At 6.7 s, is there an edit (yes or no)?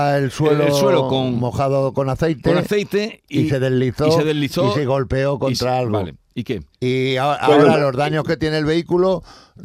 yes